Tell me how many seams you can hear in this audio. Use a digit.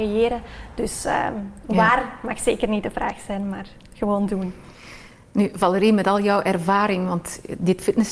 0